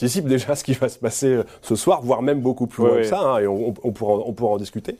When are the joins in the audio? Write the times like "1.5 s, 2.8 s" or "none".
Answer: none